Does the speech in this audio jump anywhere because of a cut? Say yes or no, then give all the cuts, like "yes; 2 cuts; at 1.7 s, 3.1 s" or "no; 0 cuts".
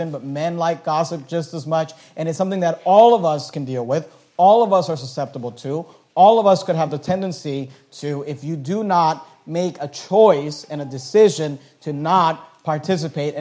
no; 0 cuts